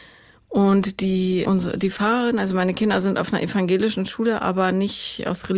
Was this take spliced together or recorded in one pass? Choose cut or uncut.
cut